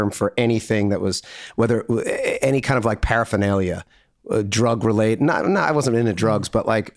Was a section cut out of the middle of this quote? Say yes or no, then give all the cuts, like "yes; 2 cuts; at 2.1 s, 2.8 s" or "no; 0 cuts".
no; 0 cuts